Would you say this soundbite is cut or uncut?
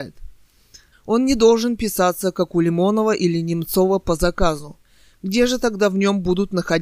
cut